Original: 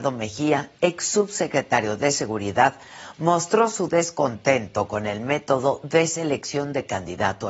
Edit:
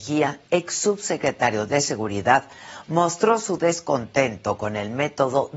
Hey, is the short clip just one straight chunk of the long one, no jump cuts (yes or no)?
yes